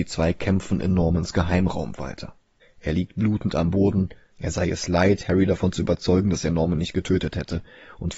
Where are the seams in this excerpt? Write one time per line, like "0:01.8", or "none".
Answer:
0:02.6
0:04.3